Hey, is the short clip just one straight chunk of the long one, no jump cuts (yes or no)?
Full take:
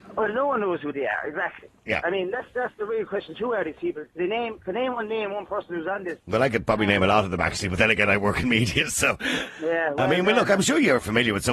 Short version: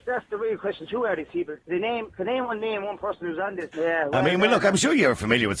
no